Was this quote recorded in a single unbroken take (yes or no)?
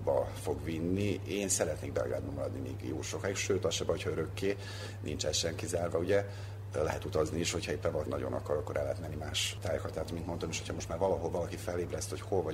no